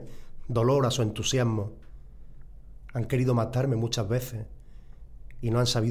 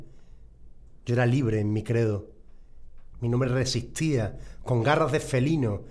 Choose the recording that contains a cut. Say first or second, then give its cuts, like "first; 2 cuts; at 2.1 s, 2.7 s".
second; 2 cuts; at 1.0 s, 3.1 s